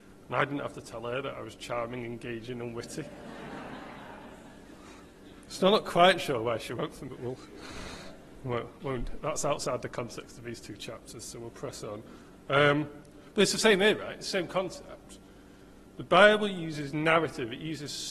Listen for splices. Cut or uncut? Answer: cut